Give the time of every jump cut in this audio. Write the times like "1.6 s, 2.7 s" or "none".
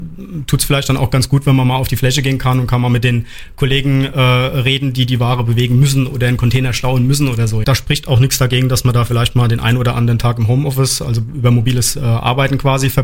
7.6 s